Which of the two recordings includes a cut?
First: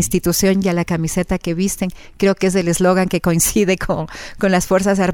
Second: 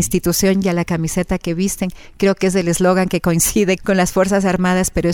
second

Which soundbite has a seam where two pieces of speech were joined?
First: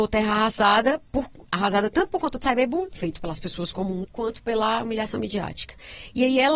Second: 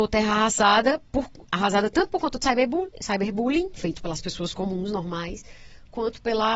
first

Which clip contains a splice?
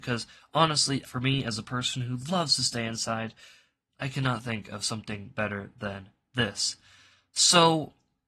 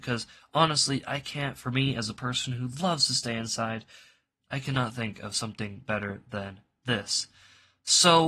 first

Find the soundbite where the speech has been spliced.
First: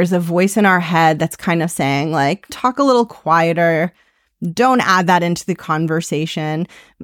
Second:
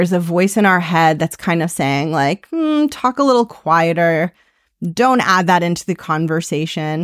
first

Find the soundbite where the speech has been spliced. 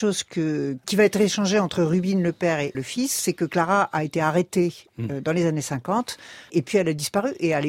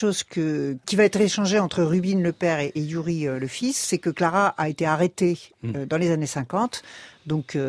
first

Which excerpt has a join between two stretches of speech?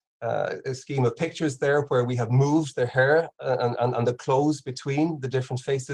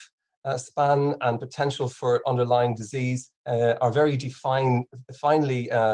second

